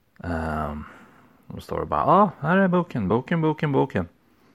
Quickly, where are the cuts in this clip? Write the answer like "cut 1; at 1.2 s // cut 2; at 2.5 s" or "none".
none